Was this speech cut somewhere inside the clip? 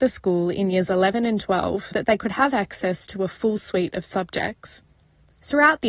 yes; 1 cut; at 1.9 s

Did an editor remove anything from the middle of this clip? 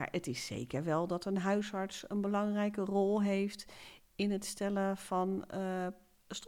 no; 0 cuts

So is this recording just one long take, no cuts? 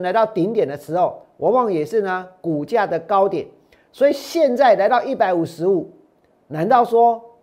yes; 0 cuts

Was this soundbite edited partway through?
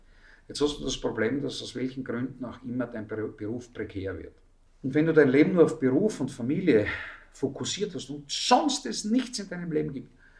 yes; 1 cut; at 4.7 s

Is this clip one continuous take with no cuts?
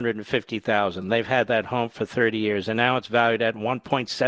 yes; 0 cuts

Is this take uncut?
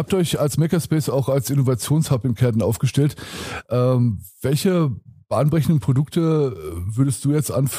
yes; 0 cuts

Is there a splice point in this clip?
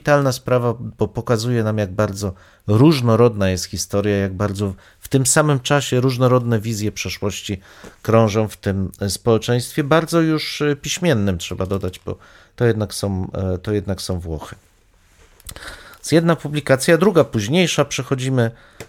no; 0 cuts

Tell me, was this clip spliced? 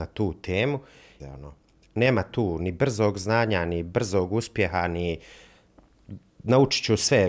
yes; 1 cut; at 1.2 s

